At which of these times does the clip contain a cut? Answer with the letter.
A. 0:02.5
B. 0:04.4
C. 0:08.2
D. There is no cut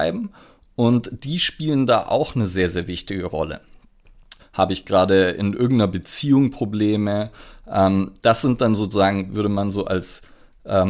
B